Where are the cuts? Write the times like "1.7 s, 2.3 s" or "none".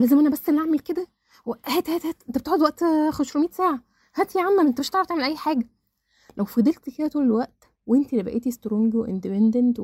none

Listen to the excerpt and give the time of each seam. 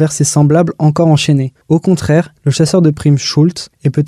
1.6 s

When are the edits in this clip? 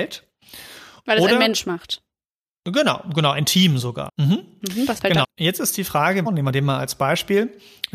4.1 s, 5.2 s, 6.3 s

